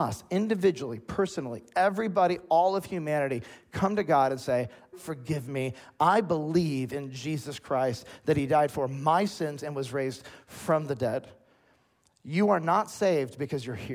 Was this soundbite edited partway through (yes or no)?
yes